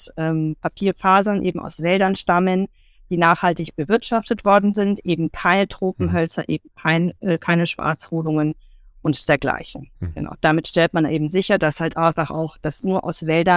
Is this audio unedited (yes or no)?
yes